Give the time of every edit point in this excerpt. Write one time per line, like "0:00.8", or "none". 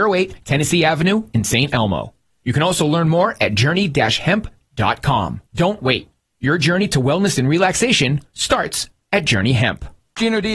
0:05.5